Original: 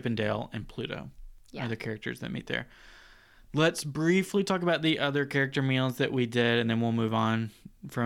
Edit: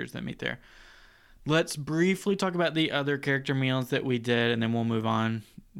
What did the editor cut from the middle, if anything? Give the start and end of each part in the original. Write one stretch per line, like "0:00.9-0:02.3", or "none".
none